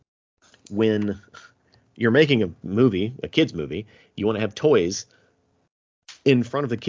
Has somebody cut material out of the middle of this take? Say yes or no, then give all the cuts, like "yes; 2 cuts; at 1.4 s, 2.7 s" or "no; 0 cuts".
no; 0 cuts